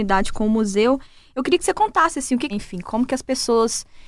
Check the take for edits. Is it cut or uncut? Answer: cut